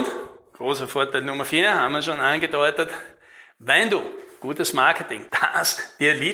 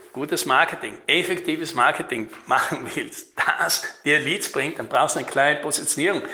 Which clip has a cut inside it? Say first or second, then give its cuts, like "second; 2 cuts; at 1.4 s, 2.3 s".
first; 1 cut; at 5.3 s